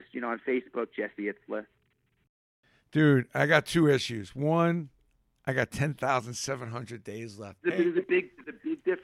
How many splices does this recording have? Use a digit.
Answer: 1